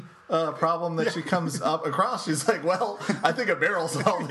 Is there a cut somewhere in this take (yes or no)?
no